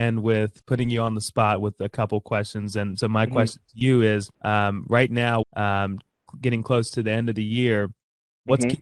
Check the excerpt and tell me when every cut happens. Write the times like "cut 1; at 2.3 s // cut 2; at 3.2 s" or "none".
cut 1; at 4.3 s // cut 2; at 5.4 s